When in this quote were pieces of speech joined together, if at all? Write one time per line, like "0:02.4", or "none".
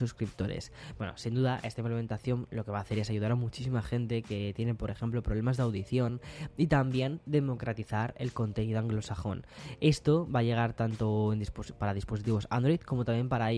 none